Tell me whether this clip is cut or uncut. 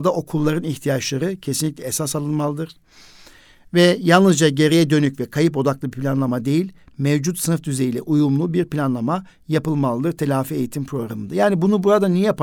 uncut